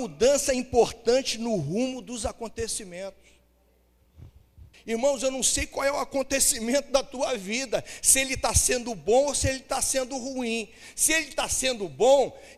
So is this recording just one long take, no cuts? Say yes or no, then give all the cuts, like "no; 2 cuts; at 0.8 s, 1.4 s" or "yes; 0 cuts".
no; 1 cut; at 4.7 s